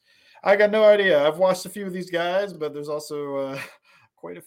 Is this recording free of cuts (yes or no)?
yes